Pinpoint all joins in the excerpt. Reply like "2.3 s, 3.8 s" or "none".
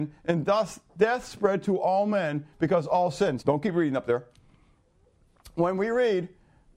3.4 s

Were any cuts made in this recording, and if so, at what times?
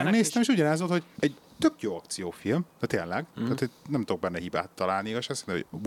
1.1 s

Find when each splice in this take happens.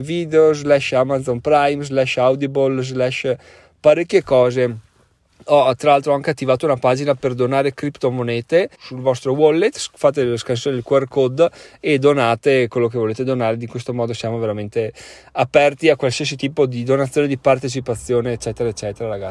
8.7 s

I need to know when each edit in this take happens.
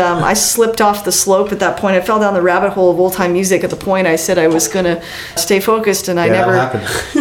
5.4 s

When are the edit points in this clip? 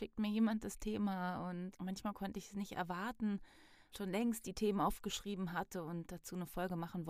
1.7 s, 3.9 s

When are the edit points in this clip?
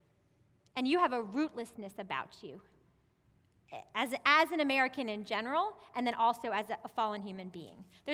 none

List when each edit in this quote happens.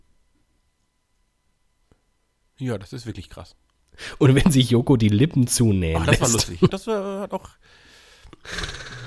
6.7 s

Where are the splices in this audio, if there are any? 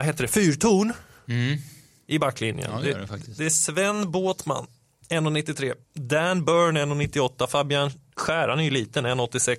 5.8 s

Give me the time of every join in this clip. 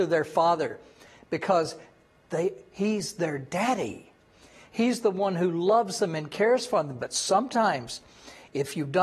none

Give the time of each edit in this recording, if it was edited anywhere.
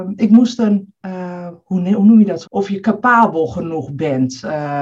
2.4 s

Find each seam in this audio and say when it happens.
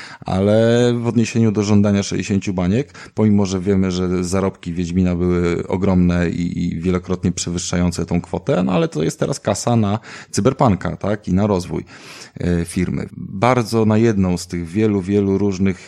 13.1 s

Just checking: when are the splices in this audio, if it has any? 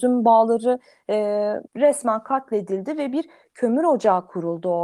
1.7 s

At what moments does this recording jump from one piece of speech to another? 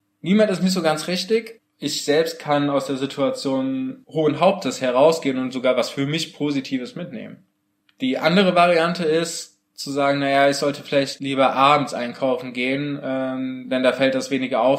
1.6 s

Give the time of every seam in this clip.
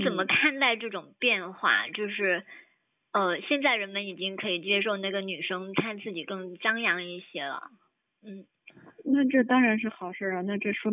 none

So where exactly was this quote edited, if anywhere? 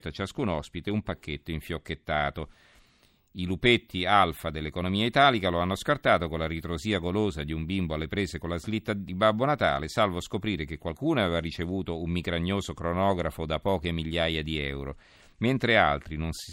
none

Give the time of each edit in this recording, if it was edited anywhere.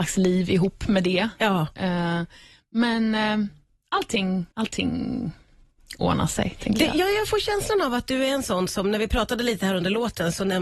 4.5 s

